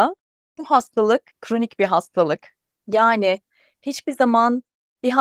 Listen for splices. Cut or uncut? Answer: cut